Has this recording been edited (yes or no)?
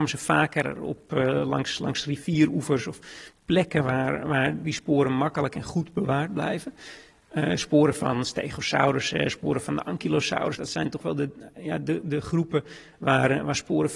no